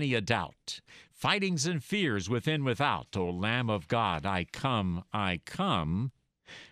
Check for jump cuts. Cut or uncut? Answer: uncut